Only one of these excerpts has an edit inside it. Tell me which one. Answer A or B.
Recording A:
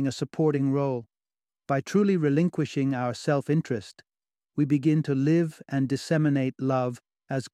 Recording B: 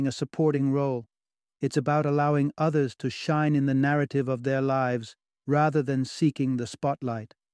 A